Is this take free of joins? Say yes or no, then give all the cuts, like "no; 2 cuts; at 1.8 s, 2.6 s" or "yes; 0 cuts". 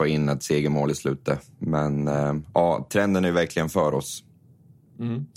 no; 1 cut; at 2.9 s